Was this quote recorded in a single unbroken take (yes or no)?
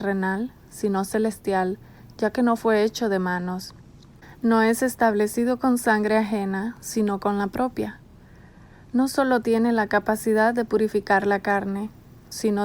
yes